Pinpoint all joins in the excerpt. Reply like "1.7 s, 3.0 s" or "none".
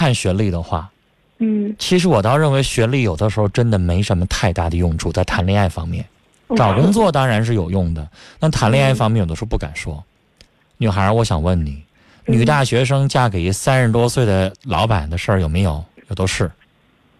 6.5 s